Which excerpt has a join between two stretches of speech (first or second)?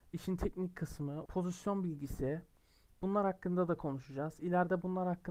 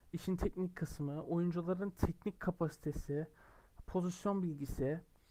first